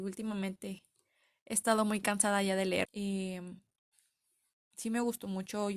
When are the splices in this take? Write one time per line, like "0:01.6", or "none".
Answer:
0:02.9

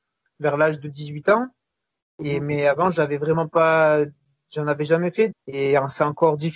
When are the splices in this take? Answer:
0:05.3

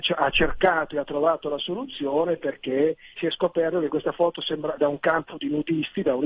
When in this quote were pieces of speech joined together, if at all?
0:03.2
0:04.8

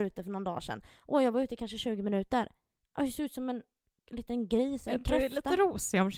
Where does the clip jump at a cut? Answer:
none

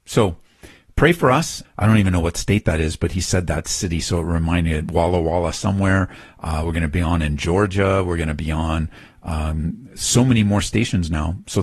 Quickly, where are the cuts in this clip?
0:01.6

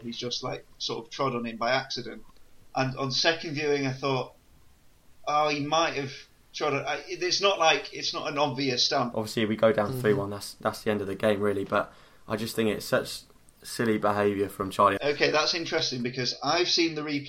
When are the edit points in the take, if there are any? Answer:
0:09.1
0:15.0

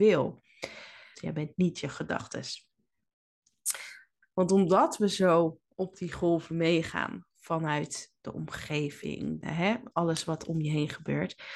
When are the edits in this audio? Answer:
0:01.1
0:04.2
0:09.4

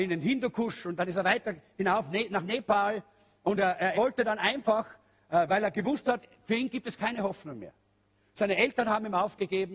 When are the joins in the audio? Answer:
0:03.9

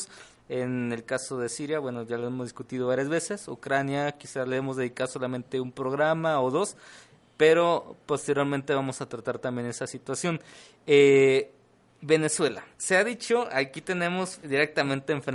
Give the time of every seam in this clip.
0:12.7
0:14.4

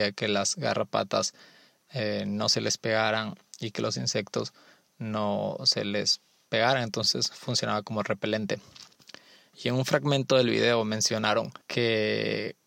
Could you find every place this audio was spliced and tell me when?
0:11.6

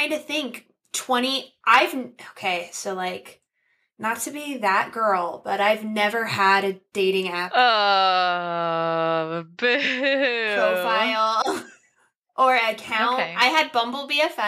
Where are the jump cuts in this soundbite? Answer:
none

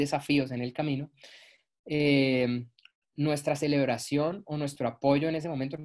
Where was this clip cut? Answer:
none

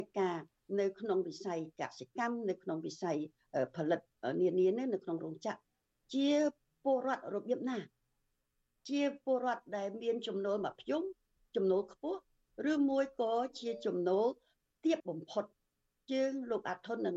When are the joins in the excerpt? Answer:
0:15.0

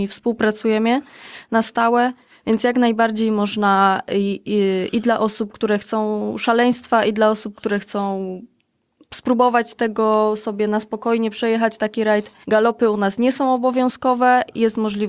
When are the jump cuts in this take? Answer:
0:12.4

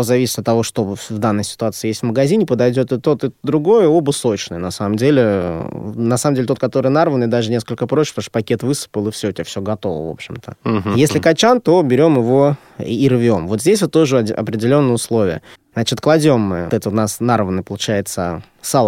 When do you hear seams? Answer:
0:15.5
0:16.7

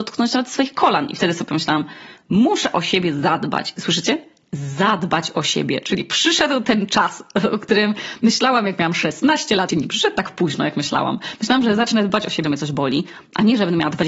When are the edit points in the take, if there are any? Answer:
0:09.7
0:12.4

